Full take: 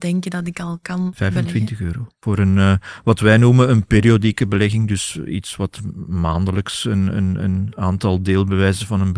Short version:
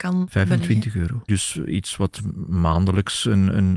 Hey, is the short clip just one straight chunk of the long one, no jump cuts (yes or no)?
no